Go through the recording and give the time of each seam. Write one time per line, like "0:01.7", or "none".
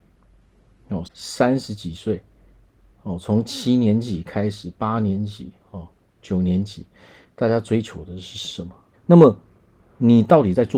0:01.0
0:08.9